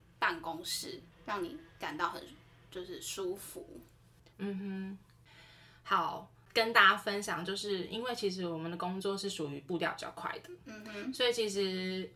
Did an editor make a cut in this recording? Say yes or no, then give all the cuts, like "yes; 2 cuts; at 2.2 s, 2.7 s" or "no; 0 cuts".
yes; 1 cut; at 4.3 s